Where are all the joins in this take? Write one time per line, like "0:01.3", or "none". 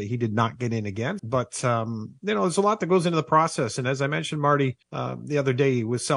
0:01.2
0:04.8